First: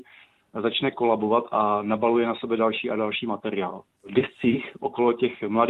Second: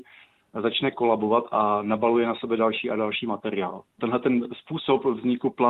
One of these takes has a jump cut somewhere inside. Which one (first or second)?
first